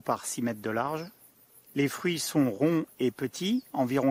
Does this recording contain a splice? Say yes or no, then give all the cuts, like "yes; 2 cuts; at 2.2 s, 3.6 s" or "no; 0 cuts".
yes; 1 cut; at 1.7 s